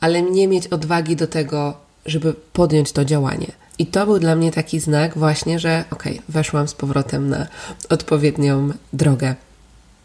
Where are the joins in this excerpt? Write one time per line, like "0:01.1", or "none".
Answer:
0:03.7